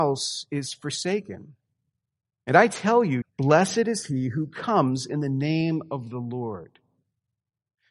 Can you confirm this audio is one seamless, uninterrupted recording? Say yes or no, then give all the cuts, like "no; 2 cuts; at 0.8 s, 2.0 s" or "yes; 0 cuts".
no; 1 cut; at 3.2 s